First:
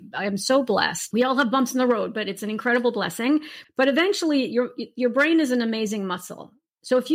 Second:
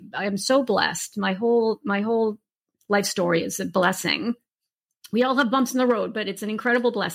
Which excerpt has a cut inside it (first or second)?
first